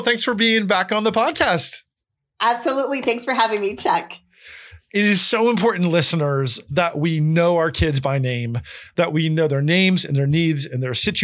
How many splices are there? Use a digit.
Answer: 0